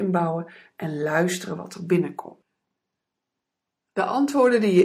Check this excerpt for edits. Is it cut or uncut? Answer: uncut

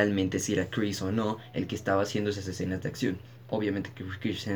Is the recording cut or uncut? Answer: uncut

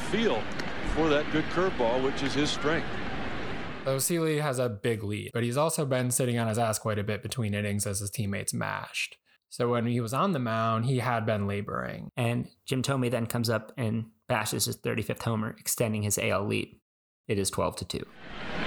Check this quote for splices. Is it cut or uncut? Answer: cut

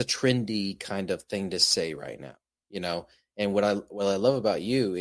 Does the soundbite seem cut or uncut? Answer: uncut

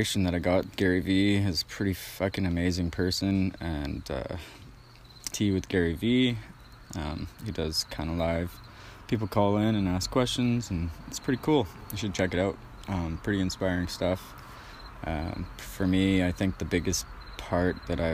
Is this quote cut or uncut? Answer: cut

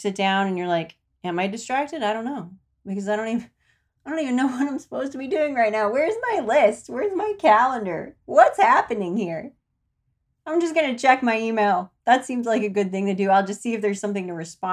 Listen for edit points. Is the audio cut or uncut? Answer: uncut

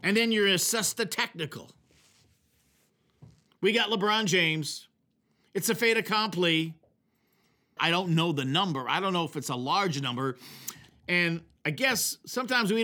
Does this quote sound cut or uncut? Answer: cut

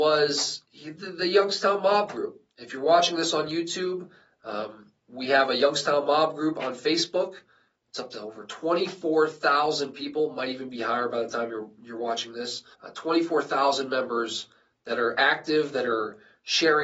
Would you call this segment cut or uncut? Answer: cut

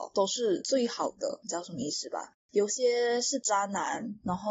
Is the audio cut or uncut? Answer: uncut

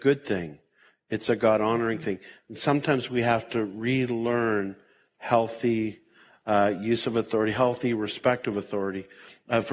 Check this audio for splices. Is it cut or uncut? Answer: uncut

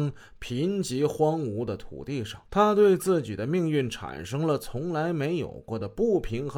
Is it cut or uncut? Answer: cut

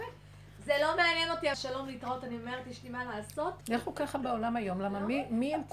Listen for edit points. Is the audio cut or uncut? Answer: cut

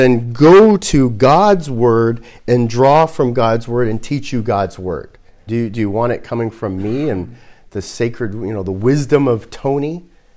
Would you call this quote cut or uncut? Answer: cut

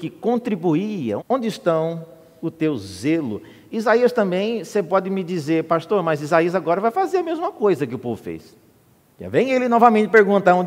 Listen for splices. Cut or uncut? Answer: cut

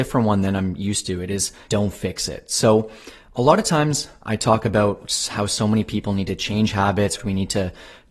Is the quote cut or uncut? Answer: cut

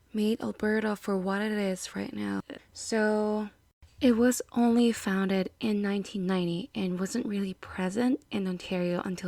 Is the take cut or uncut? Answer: cut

